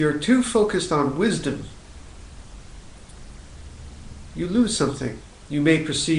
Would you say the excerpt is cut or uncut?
uncut